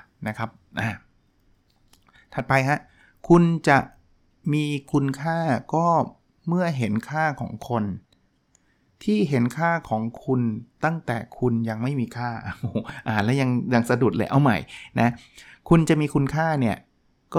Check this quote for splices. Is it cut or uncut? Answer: uncut